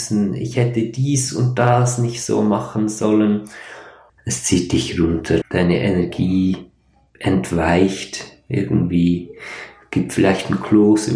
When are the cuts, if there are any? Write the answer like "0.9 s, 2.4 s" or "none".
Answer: 4.1 s, 5.4 s